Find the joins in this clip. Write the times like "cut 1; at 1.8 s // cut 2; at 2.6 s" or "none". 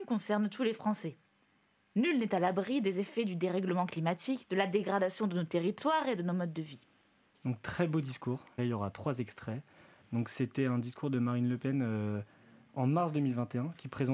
cut 1; at 4.4 s // cut 2; at 7.3 s // cut 3; at 8.6 s